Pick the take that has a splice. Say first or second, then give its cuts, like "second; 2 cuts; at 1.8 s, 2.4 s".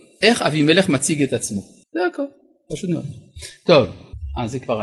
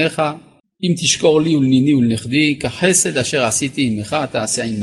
first; 1 cut; at 1.9 s